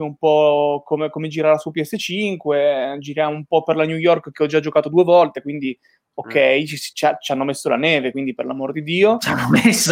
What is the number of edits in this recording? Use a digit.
0